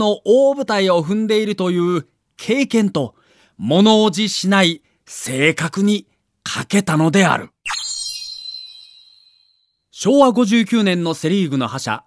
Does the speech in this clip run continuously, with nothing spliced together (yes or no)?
yes